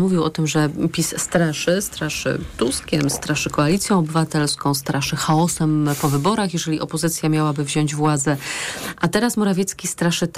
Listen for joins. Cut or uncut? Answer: uncut